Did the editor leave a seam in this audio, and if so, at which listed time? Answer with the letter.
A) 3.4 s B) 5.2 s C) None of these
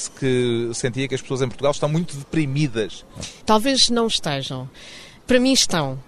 A